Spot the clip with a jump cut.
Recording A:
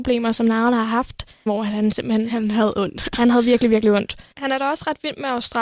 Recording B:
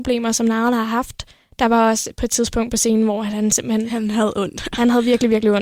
A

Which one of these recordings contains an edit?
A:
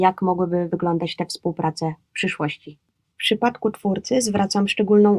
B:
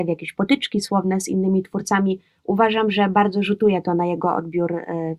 A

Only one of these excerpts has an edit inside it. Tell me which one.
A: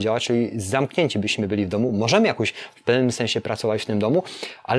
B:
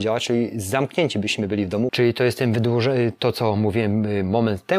B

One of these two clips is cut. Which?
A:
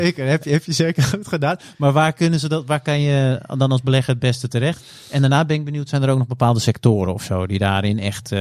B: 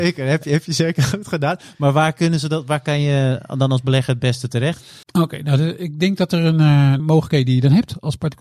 B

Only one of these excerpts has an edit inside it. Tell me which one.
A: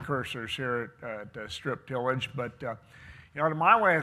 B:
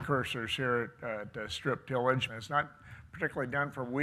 B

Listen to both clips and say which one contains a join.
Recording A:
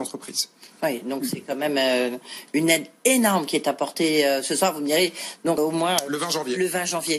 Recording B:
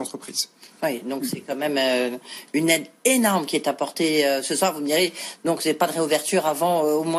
A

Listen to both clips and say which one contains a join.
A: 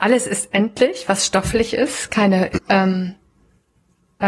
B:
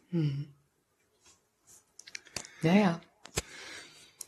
A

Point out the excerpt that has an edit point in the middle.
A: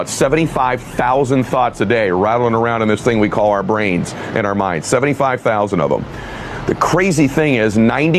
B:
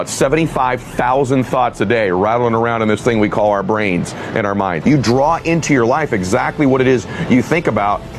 B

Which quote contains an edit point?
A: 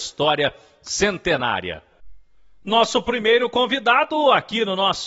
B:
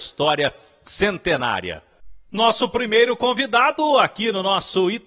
B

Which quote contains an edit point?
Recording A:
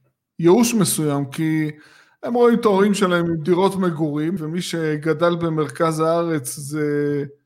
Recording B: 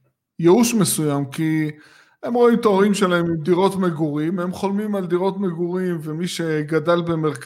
A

